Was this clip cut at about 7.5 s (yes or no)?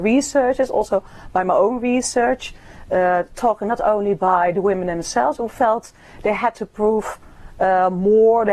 no